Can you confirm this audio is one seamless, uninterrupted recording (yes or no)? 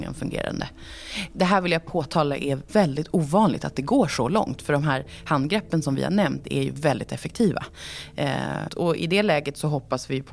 no